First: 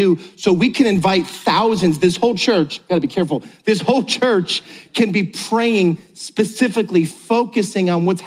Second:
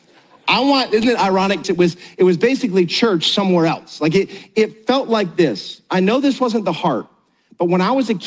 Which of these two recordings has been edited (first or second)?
second